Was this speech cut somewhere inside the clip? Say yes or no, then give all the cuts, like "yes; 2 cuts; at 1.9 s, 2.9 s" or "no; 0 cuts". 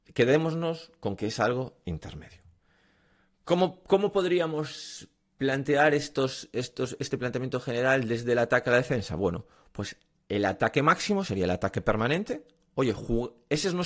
no; 0 cuts